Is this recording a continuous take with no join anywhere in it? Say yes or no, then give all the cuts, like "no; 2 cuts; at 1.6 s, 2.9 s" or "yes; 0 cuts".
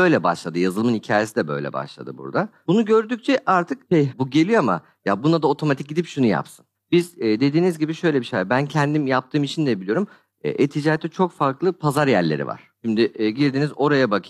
no; 2 cuts; at 4.1 s, 6.7 s